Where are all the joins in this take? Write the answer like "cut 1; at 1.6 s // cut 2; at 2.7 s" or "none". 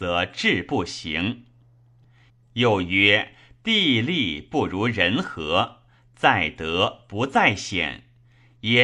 cut 1; at 2.3 s

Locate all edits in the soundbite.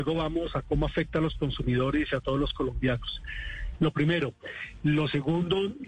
cut 1; at 3.8 s

